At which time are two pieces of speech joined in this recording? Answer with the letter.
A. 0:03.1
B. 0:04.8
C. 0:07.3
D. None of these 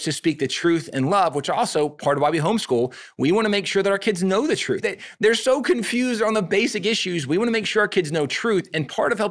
B